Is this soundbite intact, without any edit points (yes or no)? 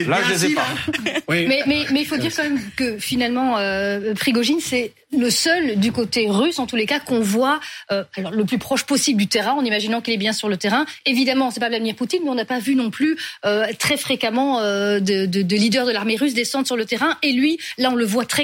yes